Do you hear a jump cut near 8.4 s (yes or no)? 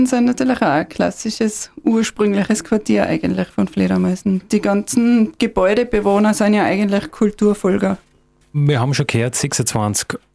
yes